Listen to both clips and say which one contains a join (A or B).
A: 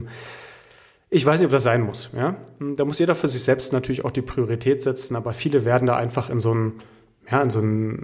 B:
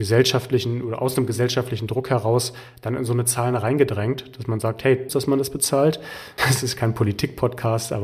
B